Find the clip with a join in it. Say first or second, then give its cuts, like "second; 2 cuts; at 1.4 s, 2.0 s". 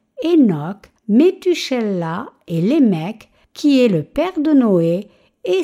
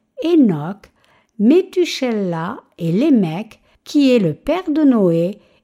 first; 1 cut; at 1.0 s